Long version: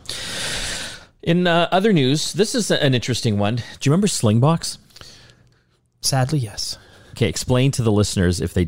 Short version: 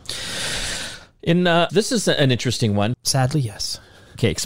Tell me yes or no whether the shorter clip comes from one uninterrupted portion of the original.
no